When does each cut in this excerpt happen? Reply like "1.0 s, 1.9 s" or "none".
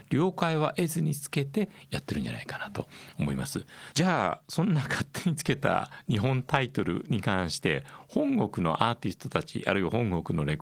3.9 s